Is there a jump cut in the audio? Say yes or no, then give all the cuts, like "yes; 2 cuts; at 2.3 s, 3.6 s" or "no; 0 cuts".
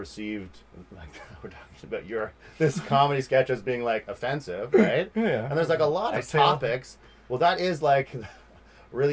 no; 0 cuts